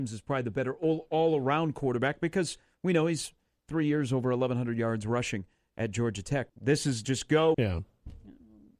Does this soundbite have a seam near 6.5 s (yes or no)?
yes